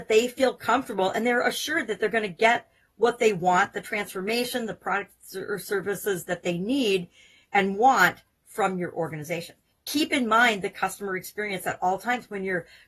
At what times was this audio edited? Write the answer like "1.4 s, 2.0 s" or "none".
9.7 s

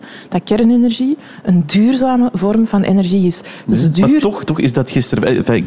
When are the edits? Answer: 4.5 s

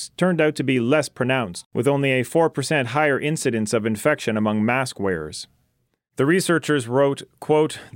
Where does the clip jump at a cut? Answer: none

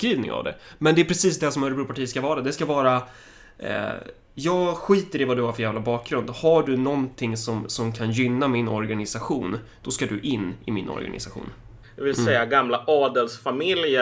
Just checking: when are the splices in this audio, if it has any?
11.8 s

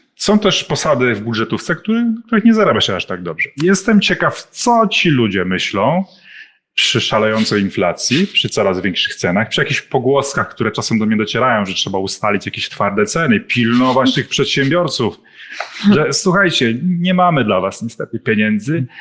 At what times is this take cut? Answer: none

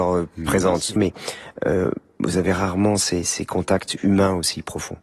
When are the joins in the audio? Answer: 1.0 s

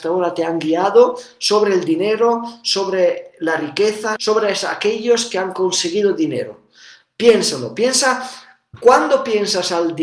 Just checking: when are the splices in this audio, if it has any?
4.2 s

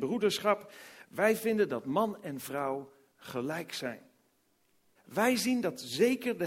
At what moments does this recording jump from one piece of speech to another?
5.0 s

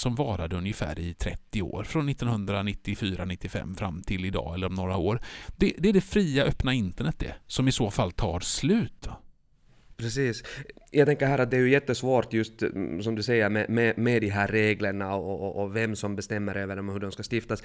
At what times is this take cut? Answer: 9.9 s

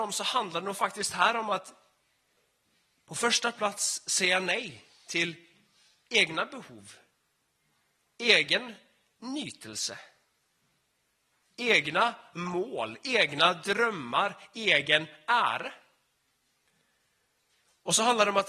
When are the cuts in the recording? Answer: none

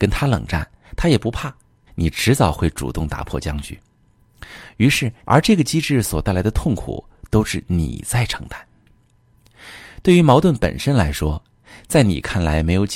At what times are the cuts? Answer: 1.9 s, 5.2 s

